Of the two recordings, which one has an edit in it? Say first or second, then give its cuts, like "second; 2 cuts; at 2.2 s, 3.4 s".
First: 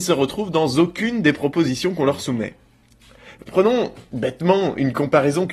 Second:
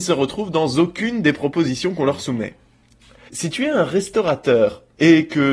second; 1 cut; at 3.3 s